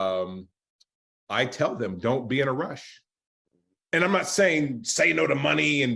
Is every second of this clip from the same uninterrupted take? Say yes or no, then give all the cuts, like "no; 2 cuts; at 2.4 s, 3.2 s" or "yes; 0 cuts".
no; 1 cut; at 3.8 s